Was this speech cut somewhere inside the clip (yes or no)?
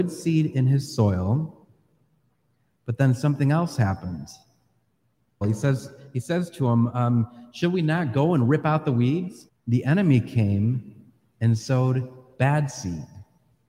yes